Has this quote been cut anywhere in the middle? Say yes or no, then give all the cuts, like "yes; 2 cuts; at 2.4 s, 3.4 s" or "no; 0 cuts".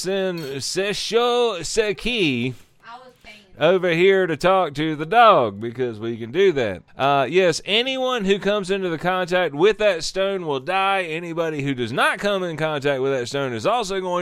yes; 1 cut; at 6.9 s